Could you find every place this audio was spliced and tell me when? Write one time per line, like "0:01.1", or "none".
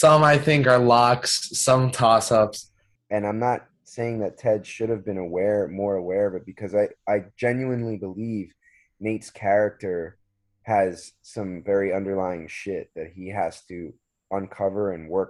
0:03.0